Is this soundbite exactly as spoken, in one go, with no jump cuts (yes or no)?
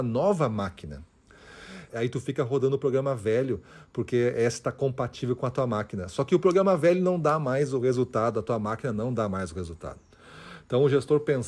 no